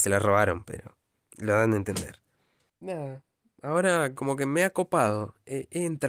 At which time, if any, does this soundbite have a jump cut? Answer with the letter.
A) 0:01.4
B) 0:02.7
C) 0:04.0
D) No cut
B